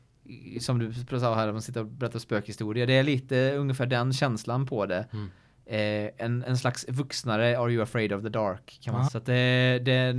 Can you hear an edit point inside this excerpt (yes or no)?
yes